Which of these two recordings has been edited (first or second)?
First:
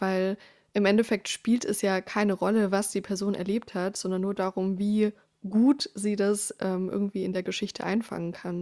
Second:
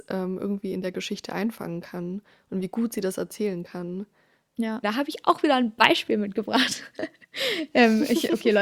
second